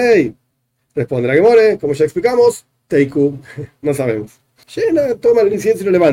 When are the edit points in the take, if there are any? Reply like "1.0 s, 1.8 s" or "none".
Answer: 4.6 s